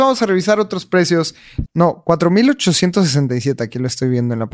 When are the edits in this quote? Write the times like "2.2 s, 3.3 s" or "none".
1.6 s